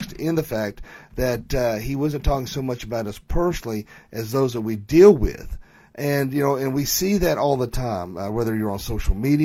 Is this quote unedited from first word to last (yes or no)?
yes